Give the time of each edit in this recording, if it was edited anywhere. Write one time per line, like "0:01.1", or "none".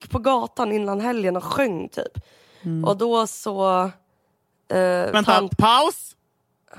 0:05.1